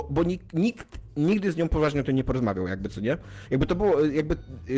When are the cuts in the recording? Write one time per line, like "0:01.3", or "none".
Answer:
none